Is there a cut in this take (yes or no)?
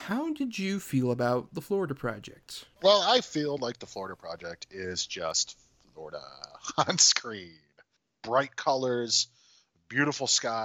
no